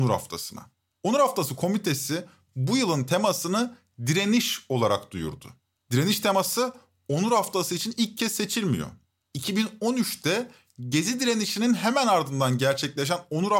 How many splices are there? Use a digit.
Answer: 0